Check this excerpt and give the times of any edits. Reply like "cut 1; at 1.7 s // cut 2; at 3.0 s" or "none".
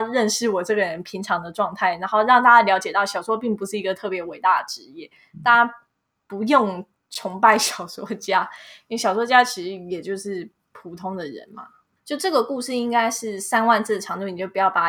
cut 1; at 12.0 s